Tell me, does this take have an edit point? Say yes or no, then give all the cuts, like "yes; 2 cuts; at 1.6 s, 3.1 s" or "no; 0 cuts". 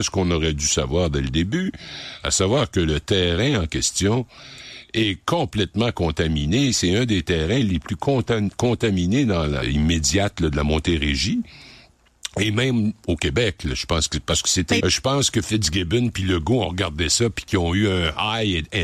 yes; 2 cuts; at 9.6 s, 14.8 s